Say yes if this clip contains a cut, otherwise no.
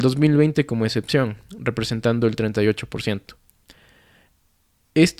no